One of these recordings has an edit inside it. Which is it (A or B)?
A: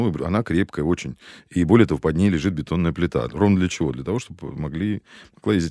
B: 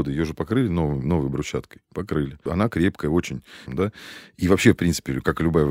B